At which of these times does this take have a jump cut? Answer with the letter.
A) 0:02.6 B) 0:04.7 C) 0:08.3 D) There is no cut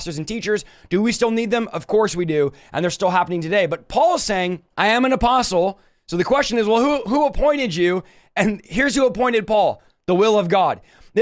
B